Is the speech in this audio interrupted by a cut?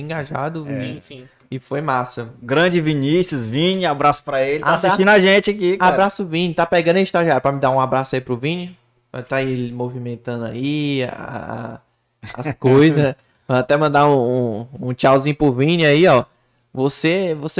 no; 0 cuts

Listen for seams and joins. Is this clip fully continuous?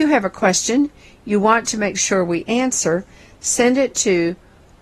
yes; 0 cuts

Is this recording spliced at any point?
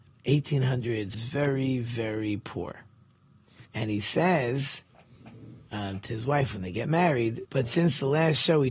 yes; 3 cuts; at 1.1 s, 3.7 s, 7.4 s

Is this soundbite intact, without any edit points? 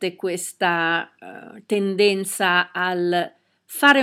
yes; 0 cuts

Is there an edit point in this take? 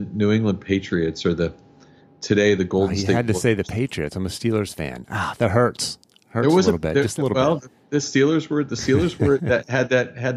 no; 0 cuts

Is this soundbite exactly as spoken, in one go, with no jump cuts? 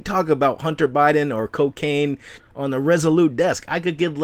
no; 1 cut; at 2.4 s

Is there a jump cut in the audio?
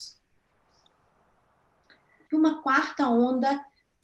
yes; 1 cut; at 2.3 s

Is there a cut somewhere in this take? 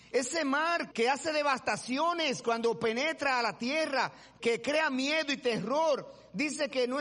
yes; 2 cuts; at 0.9 s, 4.4 s

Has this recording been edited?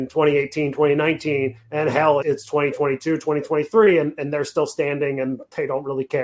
yes; 1 cut; at 2.2 s

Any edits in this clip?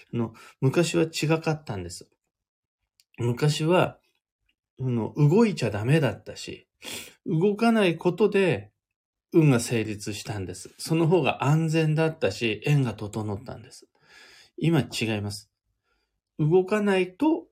yes; 1 cut; at 7.1 s

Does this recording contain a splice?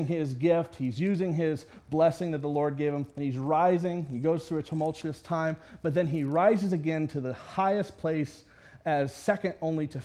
no; 0 cuts

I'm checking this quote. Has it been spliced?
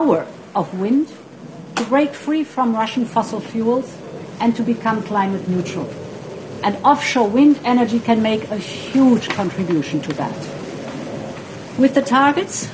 no; 0 cuts

